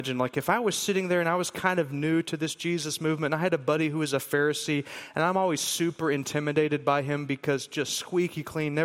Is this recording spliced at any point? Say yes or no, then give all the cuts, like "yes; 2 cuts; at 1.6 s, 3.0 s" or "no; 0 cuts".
no; 0 cuts